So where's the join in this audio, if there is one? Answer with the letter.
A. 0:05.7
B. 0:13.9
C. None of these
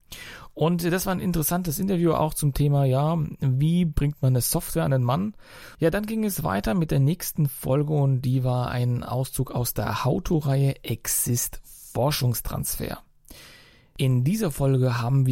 A